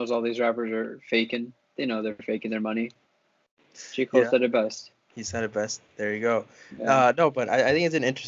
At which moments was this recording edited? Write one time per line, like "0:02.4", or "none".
0:05.0